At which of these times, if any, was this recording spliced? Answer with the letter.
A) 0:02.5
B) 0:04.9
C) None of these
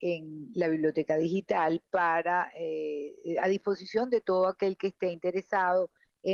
C